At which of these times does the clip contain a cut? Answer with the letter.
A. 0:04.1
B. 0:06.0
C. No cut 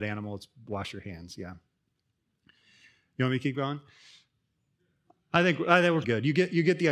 B